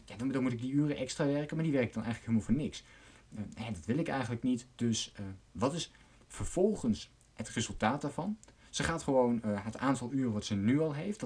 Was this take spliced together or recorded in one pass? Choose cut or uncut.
uncut